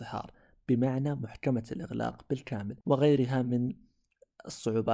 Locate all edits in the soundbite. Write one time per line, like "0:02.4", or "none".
0:02.8